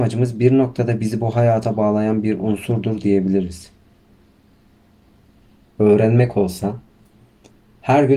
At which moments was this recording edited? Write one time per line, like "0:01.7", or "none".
0:05.7